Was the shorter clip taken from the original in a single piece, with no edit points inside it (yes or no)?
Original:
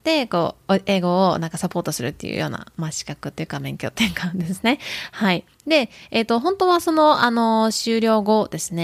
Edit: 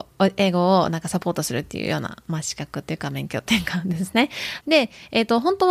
no